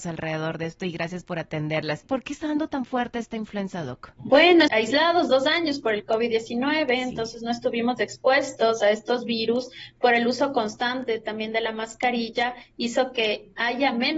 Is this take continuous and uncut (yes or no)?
no